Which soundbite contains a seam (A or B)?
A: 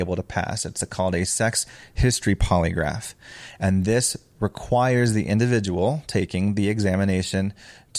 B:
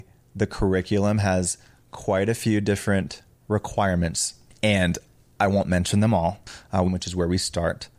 B